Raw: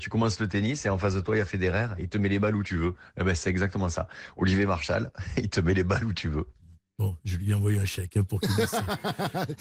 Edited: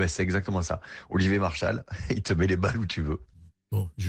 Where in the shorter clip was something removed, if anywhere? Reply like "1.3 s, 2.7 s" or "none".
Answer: none